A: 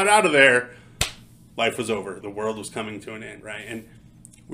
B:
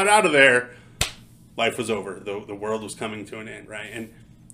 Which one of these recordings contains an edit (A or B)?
A